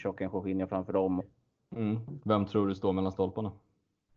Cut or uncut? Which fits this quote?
cut